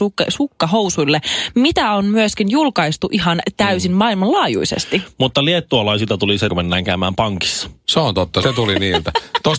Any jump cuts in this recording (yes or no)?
yes